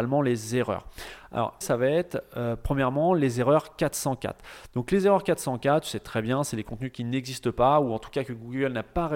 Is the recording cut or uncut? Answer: cut